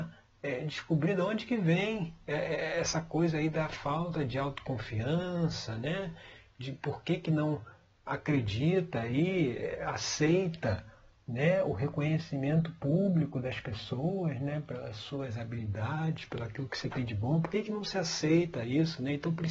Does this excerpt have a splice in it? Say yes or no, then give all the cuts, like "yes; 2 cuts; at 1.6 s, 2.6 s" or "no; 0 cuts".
no; 0 cuts